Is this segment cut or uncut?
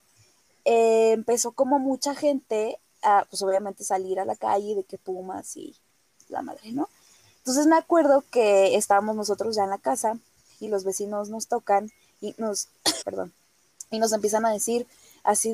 cut